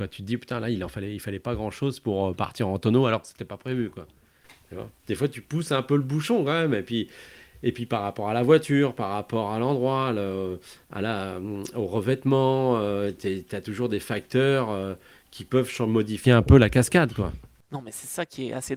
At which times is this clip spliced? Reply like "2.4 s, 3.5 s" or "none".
none